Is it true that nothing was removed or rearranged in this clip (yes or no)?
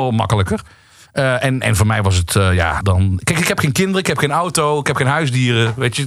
no